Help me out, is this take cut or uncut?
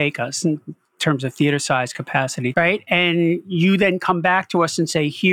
cut